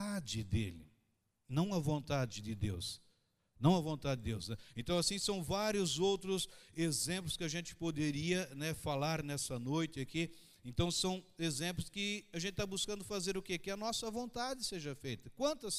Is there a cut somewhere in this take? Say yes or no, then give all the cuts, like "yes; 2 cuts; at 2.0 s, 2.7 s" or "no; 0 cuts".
no; 0 cuts